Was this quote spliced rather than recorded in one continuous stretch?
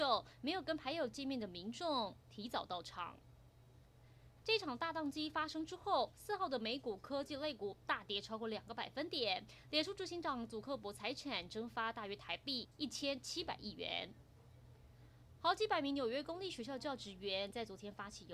yes; 1 cut; at 4.4 s

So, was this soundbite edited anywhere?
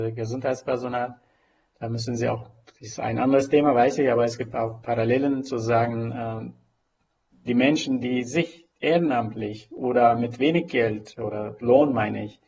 yes; 1 cut; at 8.7 s

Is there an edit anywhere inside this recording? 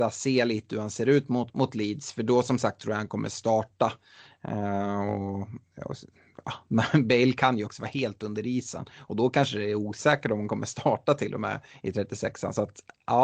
no; 0 cuts

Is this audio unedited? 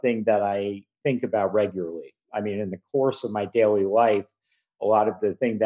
yes; 0 cuts

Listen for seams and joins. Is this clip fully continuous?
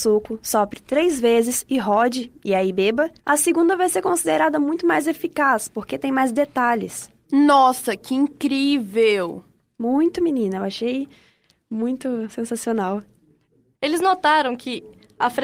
no; 2 cuts; at 3.2 s, 13.7 s

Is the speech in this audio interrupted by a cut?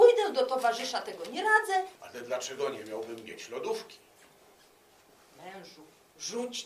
yes; 1 cut; at 2.0 s

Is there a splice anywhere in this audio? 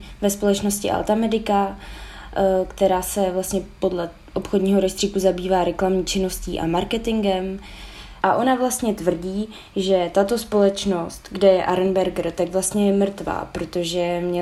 yes; 1 cut; at 8.2 s

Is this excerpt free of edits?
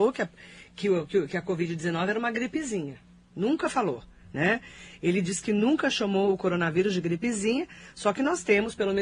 yes; 0 cuts

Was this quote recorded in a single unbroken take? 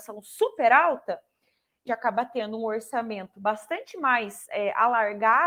no; 1 cut; at 1.9 s

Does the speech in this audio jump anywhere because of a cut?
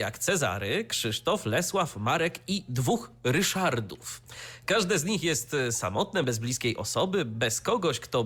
no; 0 cuts

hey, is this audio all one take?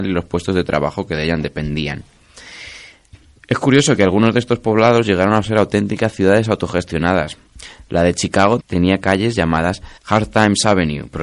no; 2 cuts; at 8.6 s, 10.0 s

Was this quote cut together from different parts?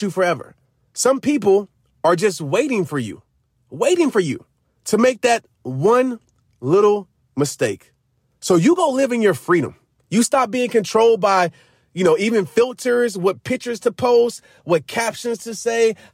no; 0 cuts

